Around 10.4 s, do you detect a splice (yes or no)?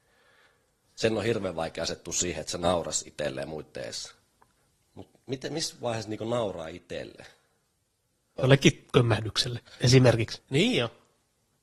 yes